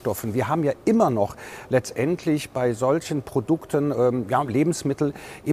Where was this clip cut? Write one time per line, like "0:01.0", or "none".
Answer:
none